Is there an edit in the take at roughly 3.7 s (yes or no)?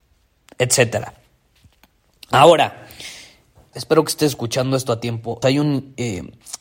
yes